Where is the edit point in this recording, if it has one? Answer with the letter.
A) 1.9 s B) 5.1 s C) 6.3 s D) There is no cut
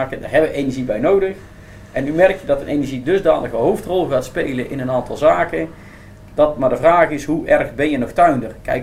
D